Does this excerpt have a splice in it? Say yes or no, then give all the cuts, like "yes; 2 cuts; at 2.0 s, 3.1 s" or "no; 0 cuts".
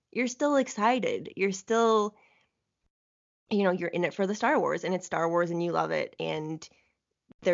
no; 0 cuts